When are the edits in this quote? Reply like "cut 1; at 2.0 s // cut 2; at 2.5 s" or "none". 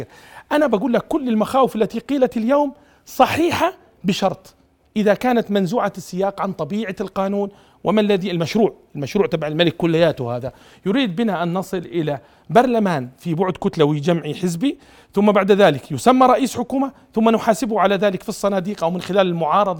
none